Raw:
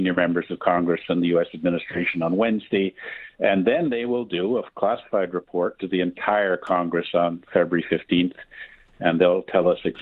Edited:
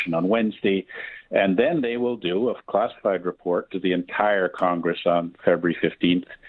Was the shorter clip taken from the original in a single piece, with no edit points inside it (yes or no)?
yes